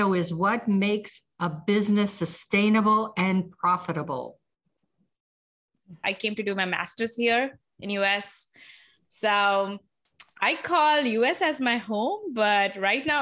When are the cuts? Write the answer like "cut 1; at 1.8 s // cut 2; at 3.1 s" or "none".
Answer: cut 1; at 6.0 s